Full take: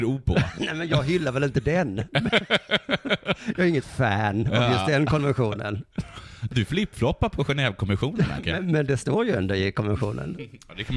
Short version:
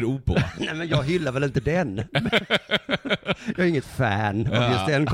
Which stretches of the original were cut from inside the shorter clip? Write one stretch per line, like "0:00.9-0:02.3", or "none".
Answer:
none

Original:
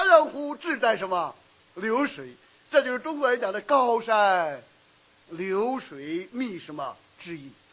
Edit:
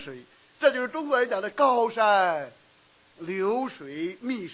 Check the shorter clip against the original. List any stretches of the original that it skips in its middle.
none

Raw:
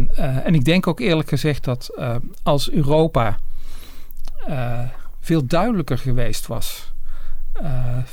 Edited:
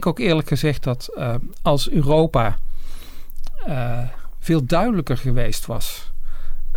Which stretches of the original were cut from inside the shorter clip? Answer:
none

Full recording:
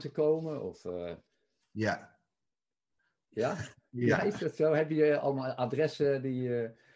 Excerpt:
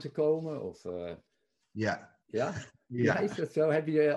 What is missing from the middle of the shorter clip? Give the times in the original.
0:02.2-0:03.2

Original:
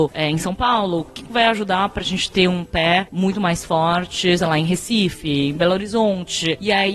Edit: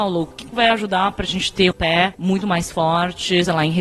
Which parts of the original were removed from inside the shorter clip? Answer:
0:02.5-0:02.6

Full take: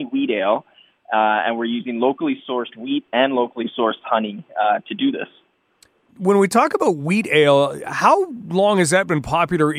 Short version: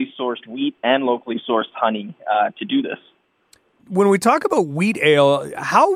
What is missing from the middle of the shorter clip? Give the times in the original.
none

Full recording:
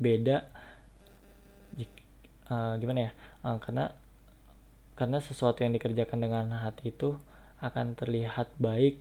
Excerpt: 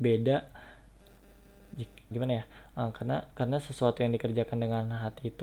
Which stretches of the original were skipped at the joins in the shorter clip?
0:02.1-0:02.8
0:04.0-0:04.9

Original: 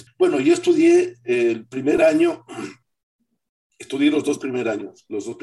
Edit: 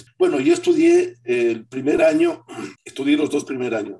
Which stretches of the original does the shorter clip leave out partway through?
0:02.8-0:03.7

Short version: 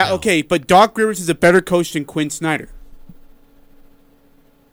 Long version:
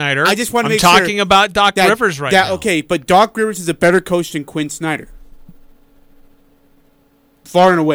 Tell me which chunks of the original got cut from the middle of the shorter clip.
none

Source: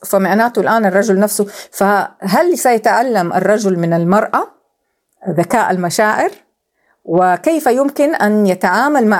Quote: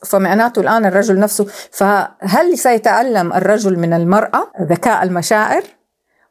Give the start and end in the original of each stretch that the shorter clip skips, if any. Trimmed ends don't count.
0:04.5-0:05.2

